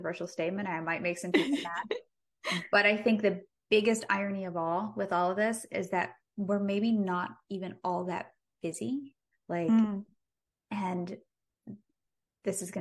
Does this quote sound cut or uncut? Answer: cut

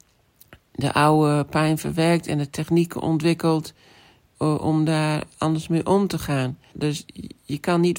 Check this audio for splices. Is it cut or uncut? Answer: cut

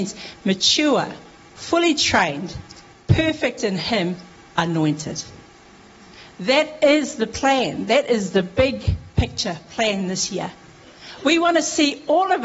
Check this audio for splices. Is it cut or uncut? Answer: uncut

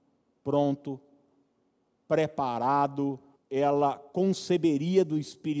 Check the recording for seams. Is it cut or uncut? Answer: cut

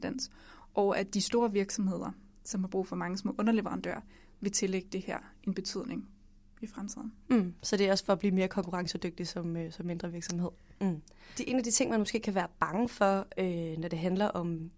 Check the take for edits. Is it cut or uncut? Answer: cut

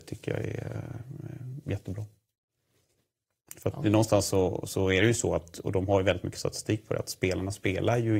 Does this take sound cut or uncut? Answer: uncut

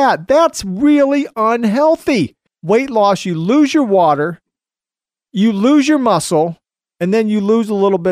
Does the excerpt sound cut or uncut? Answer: cut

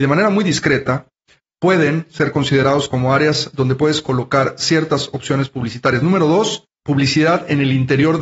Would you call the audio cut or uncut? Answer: uncut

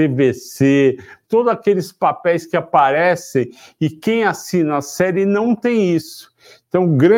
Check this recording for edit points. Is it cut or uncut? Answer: cut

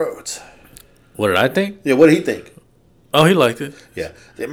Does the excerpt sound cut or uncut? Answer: uncut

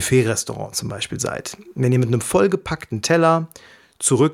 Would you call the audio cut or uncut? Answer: uncut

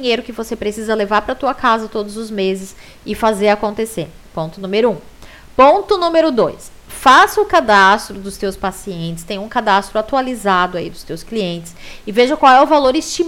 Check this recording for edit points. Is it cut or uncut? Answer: uncut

